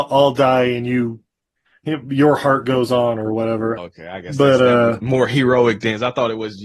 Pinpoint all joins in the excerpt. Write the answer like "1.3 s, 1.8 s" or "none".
3.8 s